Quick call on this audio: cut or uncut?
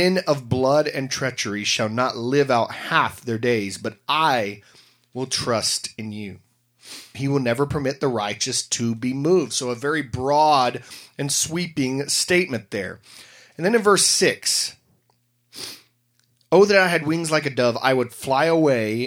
cut